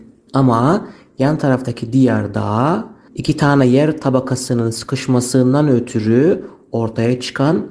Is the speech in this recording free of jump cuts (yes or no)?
yes